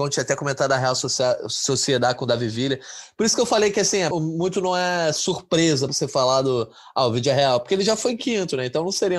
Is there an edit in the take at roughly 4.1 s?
yes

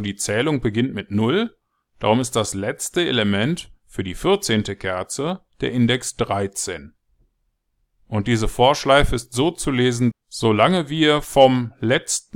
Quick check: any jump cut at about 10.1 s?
yes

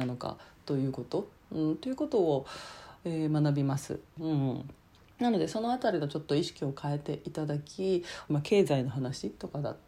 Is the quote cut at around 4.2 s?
yes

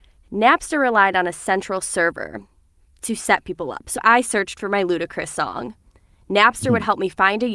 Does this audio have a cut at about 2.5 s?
no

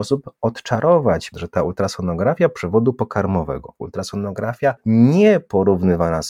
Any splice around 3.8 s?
yes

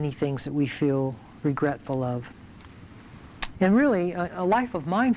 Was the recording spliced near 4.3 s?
yes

